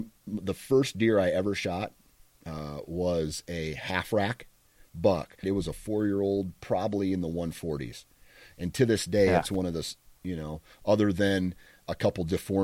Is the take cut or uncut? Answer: cut